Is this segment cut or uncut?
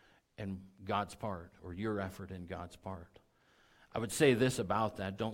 uncut